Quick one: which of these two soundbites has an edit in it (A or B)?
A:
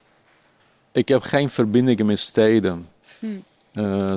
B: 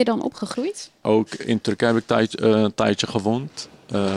B